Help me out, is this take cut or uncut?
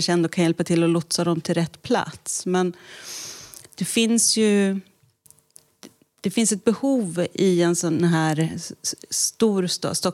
uncut